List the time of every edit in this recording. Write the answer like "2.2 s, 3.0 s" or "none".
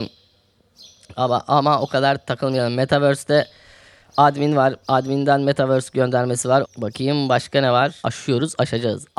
6.6 s, 8.0 s